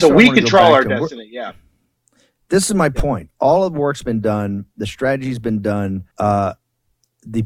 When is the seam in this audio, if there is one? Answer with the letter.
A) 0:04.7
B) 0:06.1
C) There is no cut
B